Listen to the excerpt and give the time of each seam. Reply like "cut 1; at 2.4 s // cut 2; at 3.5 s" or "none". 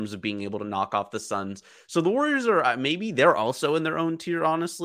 none

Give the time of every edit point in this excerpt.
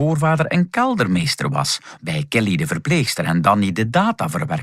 cut 1; at 2.0 s

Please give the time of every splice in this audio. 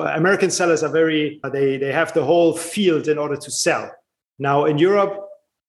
none

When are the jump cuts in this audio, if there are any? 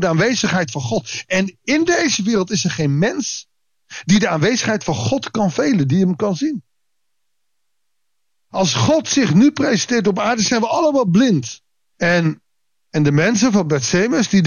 cut 1; at 11.9 s

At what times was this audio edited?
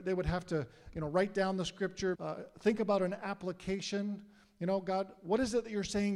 cut 1; at 2.1 s

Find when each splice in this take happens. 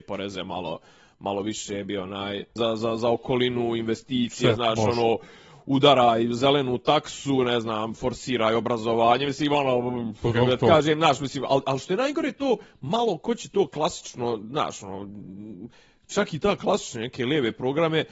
cut 1; at 2.6 s

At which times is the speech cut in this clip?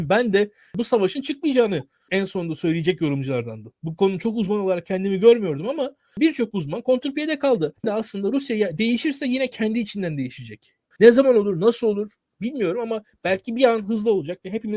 cut 1; at 7.8 s // cut 2; at 10.9 s

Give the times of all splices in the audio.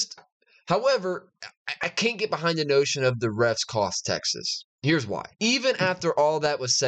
cut 1; at 5.3 s

